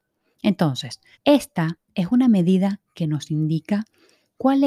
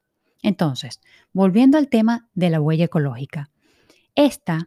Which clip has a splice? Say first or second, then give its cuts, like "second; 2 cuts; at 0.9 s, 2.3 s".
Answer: first; 1 cut; at 1.1 s